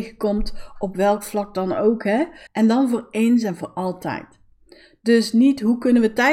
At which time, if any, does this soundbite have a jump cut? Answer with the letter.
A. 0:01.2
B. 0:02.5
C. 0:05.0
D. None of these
B